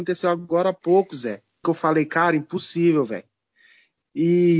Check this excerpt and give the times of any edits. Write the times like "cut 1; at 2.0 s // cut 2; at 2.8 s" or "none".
cut 1; at 1.6 s